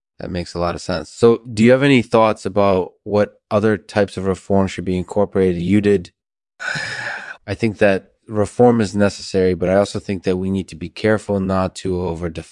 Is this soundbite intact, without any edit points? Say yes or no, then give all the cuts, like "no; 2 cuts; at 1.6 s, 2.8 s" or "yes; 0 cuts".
no; 1 cut; at 7.4 s